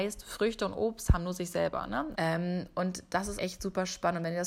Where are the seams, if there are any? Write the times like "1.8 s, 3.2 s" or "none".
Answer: 2.1 s, 3.4 s